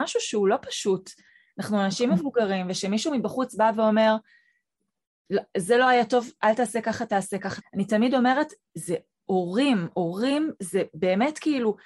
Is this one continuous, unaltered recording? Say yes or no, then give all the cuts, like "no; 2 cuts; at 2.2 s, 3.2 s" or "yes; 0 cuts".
no; 1 cut; at 7.6 s